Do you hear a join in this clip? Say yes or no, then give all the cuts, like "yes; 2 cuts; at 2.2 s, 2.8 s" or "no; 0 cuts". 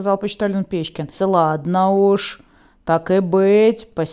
yes; 1 cut; at 1.2 s